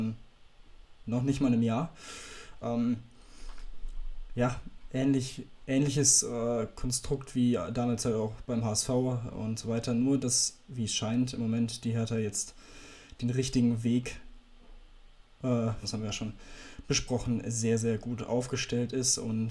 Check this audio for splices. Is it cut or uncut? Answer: cut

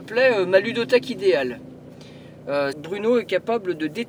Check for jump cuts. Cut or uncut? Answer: cut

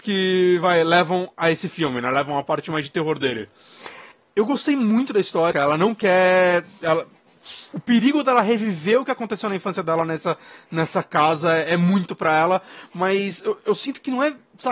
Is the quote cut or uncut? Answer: cut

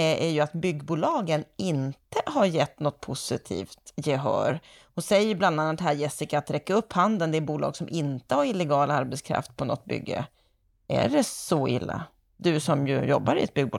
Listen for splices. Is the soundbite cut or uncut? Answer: uncut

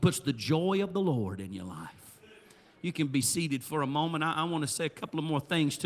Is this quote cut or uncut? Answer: uncut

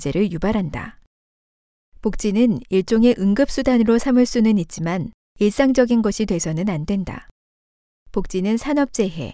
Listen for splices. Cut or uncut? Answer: uncut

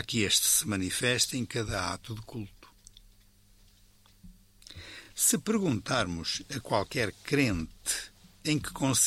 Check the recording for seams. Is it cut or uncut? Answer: uncut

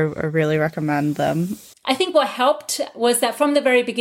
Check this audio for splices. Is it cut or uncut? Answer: cut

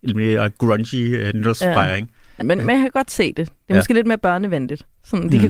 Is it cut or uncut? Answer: cut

